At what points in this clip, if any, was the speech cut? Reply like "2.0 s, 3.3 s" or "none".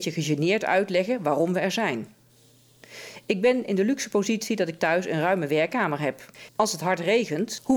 6.5 s

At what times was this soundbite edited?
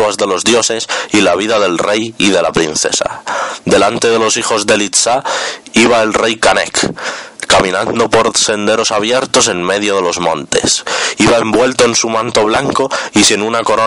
none

